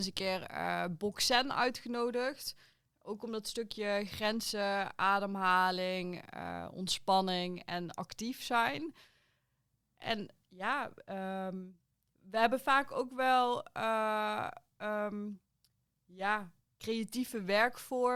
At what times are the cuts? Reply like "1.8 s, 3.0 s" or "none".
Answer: none